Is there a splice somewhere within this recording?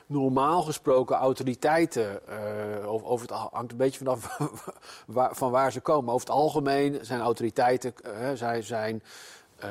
no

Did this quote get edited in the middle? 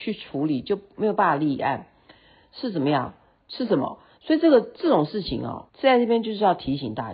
yes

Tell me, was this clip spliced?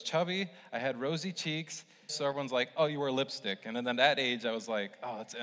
yes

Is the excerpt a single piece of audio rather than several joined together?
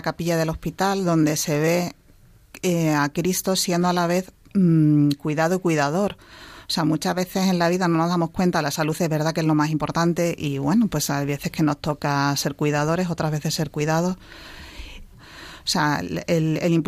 no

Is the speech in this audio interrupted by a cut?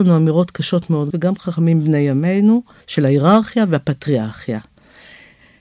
yes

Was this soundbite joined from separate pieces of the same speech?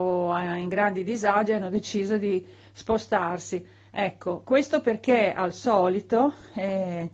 no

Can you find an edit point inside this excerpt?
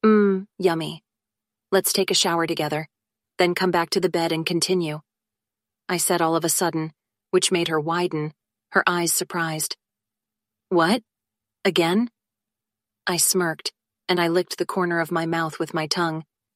no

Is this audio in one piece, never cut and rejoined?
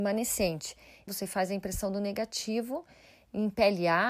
no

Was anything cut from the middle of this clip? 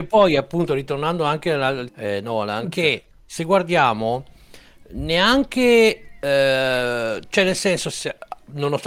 yes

